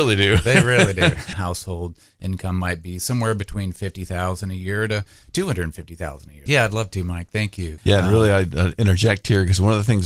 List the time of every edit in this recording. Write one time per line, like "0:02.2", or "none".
0:01.3
0:06.5
0:07.8